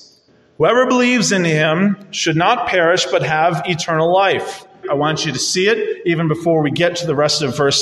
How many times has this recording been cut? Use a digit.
1